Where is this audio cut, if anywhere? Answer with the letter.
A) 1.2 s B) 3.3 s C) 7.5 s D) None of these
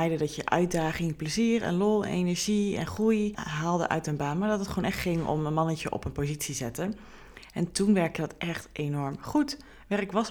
B